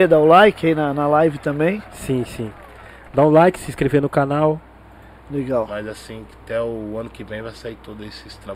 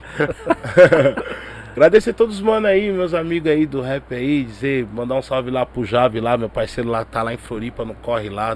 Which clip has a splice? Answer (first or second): first